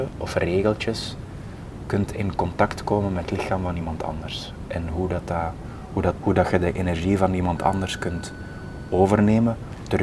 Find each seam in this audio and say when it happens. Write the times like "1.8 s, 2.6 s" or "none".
6.2 s